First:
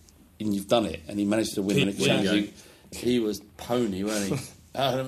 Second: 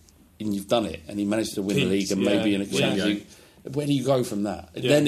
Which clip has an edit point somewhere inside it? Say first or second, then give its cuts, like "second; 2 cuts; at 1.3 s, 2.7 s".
first; 2 cuts; at 1.8 s, 2.9 s